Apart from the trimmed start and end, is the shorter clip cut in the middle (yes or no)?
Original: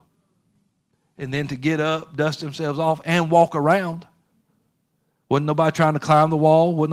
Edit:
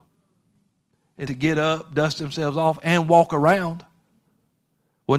yes